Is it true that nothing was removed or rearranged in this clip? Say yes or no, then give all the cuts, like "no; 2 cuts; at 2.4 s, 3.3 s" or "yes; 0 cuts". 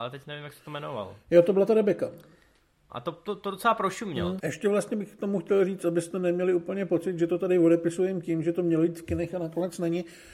no; 2 cuts; at 2.9 s, 4.4 s